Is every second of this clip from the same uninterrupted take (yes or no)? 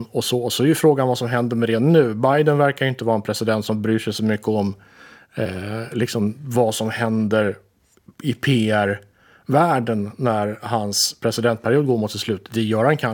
yes